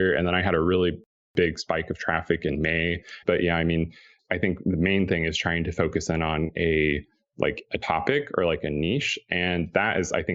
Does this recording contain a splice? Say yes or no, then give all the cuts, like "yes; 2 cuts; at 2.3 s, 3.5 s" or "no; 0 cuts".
yes; 1 cut; at 3.2 s